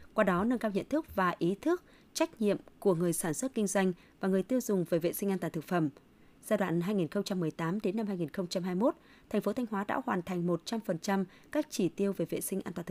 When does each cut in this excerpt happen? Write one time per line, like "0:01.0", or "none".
none